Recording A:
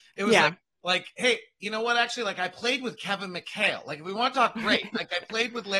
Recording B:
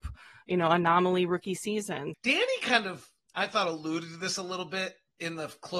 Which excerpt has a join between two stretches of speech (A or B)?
B